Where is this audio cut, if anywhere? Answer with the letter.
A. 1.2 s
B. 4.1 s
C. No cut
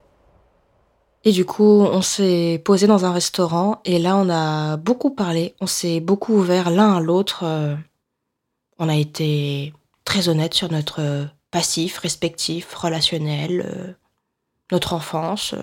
C